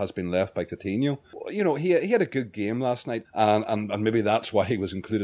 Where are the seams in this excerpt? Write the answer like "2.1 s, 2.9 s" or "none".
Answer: 3.2 s